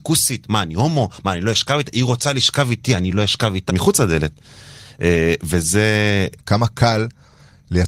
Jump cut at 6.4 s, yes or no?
yes